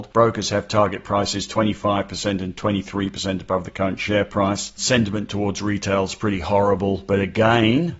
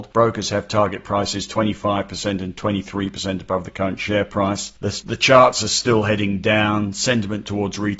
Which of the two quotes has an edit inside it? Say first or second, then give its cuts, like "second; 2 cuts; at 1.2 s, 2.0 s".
first; 1 cut; at 4.8 s